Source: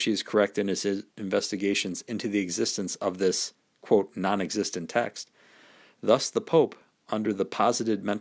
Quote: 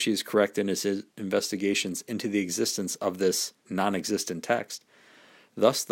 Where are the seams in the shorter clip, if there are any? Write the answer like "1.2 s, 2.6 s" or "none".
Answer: 3.6 s